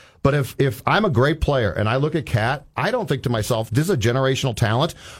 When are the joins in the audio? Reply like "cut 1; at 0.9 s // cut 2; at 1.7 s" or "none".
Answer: cut 1; at 3.7 s